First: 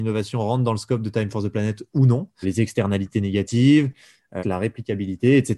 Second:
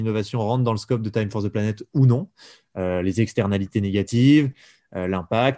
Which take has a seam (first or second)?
first